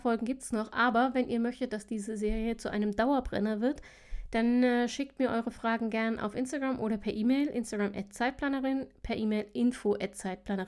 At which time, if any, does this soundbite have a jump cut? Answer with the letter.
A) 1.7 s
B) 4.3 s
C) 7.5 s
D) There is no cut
D